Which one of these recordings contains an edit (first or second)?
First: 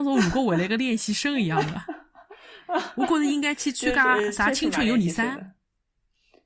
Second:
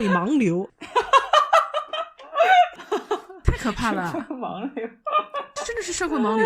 second